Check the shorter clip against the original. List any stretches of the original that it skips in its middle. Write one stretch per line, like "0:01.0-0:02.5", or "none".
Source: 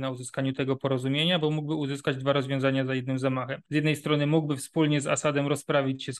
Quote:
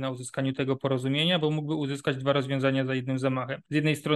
none